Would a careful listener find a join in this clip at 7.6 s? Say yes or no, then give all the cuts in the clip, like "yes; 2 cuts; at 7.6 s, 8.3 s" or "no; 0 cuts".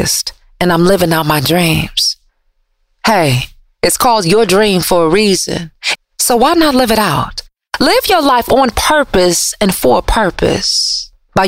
no; 1 cut; at 6.0 s